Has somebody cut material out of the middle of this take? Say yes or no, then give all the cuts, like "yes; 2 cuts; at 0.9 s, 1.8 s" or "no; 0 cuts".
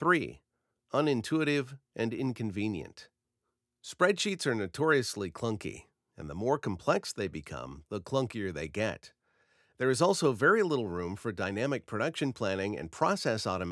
no; 0 cuts